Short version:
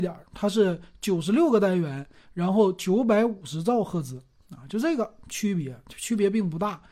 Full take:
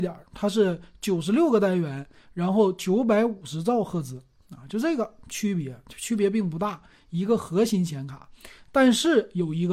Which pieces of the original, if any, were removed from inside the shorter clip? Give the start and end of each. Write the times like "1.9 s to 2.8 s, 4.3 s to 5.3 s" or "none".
none